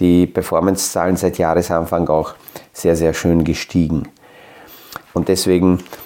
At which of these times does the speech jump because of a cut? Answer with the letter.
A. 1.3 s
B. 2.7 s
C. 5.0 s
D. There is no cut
C